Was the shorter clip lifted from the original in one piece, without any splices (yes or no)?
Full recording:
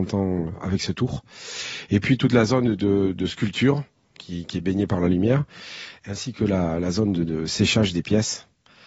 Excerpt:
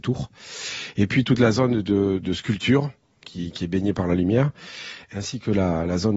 yes